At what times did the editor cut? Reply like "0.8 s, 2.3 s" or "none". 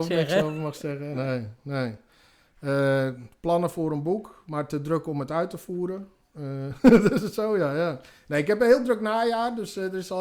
none